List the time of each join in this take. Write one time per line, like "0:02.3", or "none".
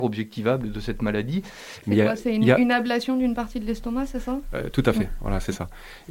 0:01.8